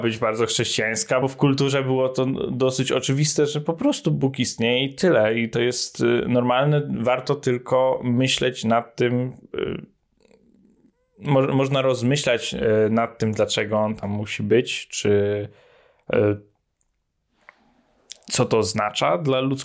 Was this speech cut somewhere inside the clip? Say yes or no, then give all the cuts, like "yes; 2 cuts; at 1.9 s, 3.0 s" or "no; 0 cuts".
no; 0 cuts